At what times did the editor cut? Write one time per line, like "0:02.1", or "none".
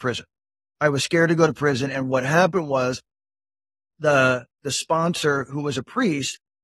none